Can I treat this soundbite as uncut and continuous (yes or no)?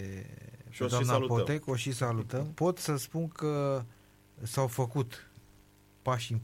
no